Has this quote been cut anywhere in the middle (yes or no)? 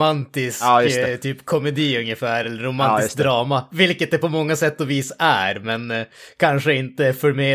no